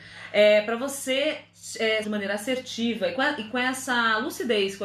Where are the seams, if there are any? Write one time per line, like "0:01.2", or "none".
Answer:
0:02.0

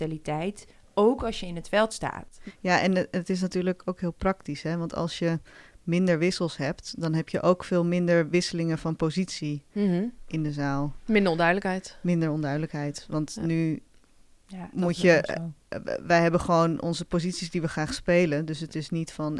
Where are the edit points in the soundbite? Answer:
none

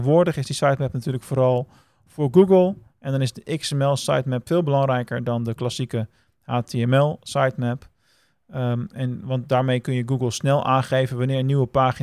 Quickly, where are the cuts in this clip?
none

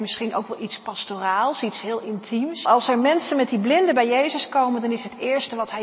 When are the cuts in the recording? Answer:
0:02.6

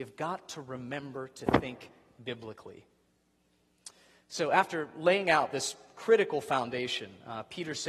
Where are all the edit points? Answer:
none

